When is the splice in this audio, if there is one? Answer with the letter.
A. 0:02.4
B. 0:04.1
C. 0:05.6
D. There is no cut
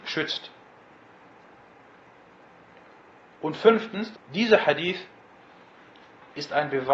B